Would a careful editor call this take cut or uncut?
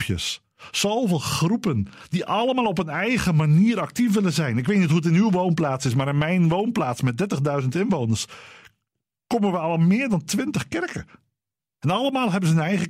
uncut